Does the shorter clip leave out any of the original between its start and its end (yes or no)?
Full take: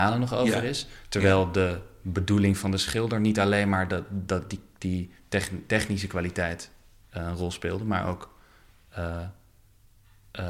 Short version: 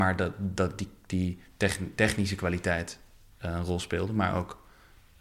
no